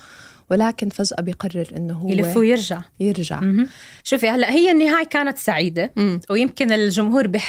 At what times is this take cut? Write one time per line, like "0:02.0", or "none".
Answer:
0:04.0